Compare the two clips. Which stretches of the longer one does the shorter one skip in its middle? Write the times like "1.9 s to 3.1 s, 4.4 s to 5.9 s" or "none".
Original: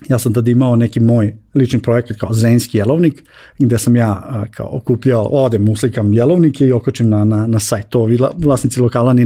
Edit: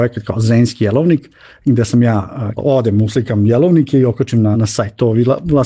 4.5 s to 5.2 s, 7.2 s to 7.5 s